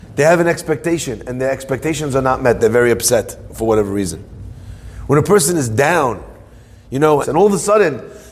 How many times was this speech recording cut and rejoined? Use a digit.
1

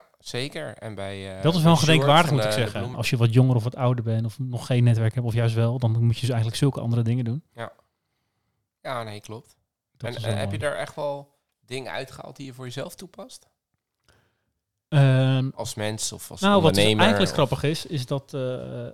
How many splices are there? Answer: 1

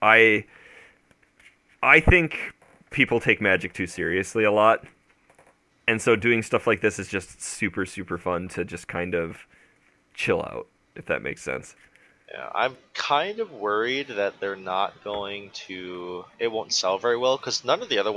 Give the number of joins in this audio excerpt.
0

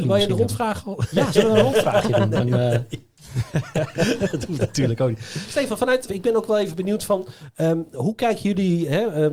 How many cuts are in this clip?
1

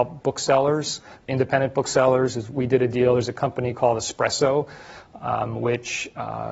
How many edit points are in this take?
1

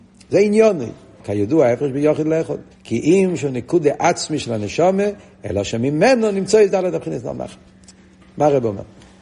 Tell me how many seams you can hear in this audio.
2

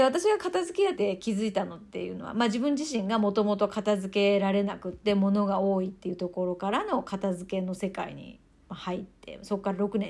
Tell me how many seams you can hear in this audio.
1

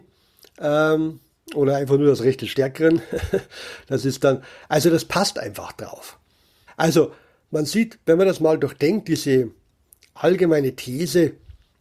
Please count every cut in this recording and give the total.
1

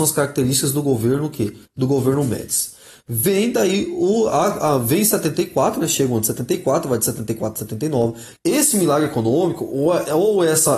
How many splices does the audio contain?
1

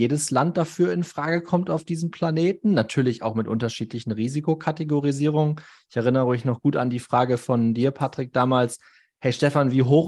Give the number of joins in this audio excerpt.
0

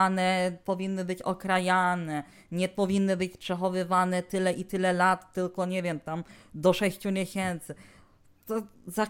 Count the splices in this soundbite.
0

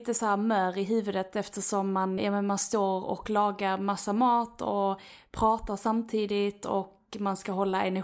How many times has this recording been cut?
1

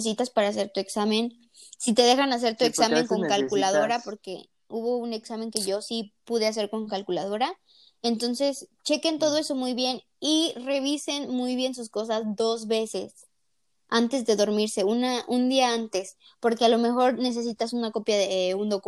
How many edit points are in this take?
0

